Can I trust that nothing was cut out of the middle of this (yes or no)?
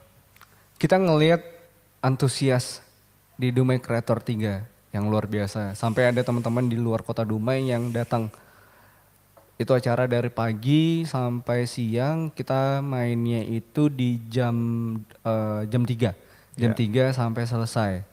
yes